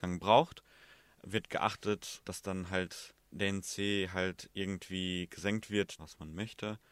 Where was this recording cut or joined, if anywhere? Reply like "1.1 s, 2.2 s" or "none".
2.2 s, 6.0 s